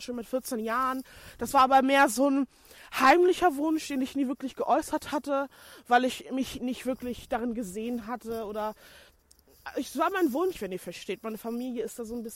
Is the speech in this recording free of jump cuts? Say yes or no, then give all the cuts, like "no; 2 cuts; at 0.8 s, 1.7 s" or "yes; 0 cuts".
no; 1 cut; at 10.5 s